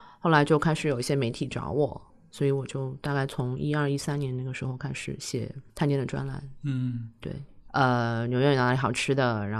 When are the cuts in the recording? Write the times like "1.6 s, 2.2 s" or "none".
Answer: 5.7 s, 7.7 s